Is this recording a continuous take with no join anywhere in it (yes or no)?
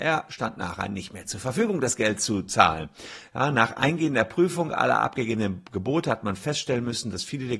yes